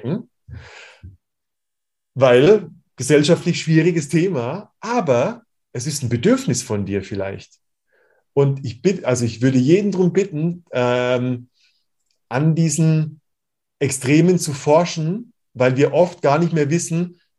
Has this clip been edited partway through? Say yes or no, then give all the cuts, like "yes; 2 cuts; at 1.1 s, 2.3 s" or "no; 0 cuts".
no; 0 cuts